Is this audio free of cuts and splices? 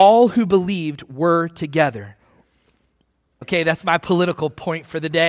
no; 1 cut; at 3.4 s

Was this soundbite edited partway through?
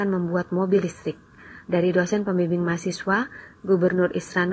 yes; 1 cut; at 1.6 s

